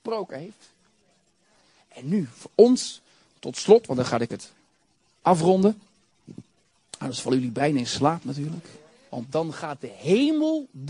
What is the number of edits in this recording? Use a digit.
1